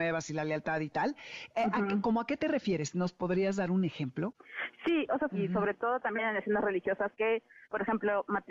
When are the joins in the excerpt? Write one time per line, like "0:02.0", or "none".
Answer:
0:05.3